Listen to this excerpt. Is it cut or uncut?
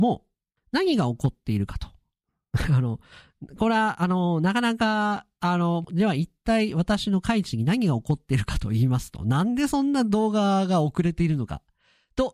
cut